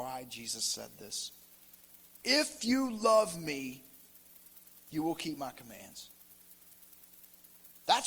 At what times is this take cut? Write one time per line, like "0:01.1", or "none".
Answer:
0:02.2